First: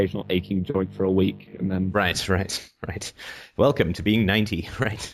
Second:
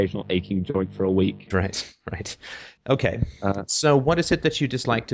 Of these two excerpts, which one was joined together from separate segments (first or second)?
second